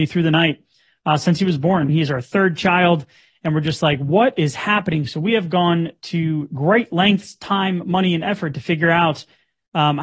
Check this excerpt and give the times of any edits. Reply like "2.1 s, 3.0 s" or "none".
1.9 s